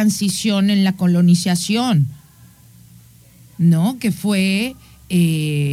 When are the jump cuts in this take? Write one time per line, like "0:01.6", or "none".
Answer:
none